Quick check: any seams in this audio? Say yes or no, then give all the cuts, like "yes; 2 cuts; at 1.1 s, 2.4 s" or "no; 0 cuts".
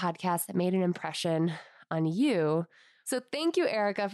no; 0 cuts